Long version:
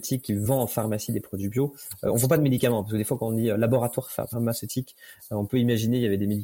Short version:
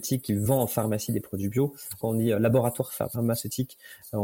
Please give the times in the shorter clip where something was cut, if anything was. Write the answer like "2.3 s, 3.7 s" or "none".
2.0 s